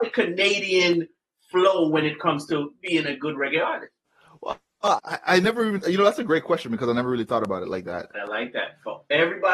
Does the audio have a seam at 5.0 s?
yes; 2 cuts; at 5.0 s, 8.1 s

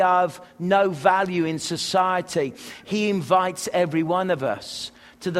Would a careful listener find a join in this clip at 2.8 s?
yes; 1 cut; at 2.8 s

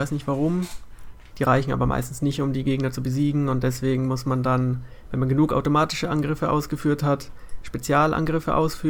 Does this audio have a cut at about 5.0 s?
no; 1 cut; at 1.3 s

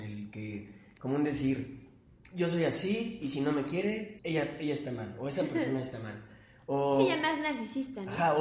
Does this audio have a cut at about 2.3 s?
no; 1 cut; at 4.2 s

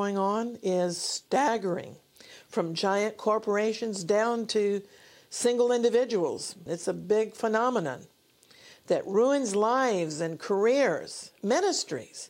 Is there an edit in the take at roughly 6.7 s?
yes; 1 cut; at 6.7 s

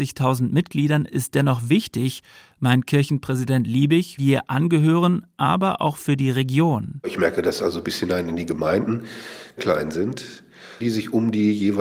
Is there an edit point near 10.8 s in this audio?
yes; 3 cuts; at 4.2 s, 9.6 s, 10.8 s

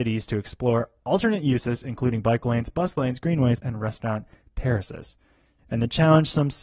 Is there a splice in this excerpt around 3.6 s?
yes; 2 cuts; at 3.6 s, 5.6 s

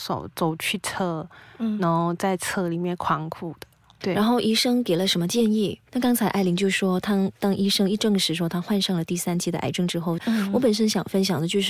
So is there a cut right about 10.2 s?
yes; 2 cuts; at 5.9 s, 10.2 s

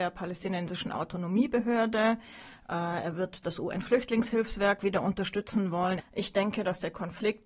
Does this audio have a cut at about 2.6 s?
no; 1 cut; at 6.0 s

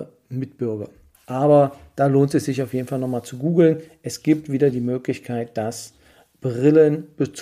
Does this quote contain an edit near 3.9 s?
no; 1 cut; at 1.1 s

